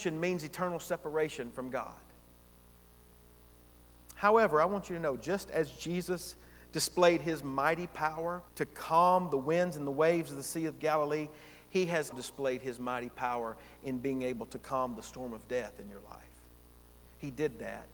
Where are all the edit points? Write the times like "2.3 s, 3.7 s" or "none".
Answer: 8.5 s, 12.1 s